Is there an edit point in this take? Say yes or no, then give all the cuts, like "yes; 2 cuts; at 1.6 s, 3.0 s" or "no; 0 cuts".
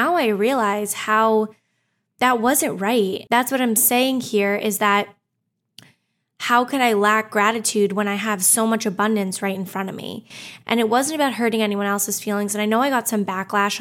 yes; 2 cuts; at 3.3 s, 10.6 s